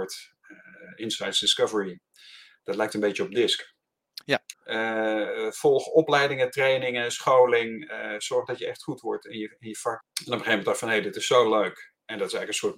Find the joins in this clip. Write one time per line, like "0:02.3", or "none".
0:04.5
0:10.0